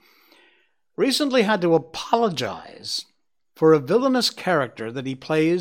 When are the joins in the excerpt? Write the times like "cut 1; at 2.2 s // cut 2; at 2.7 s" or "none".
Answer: none